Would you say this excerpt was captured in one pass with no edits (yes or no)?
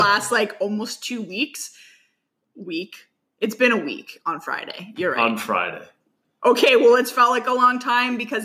yes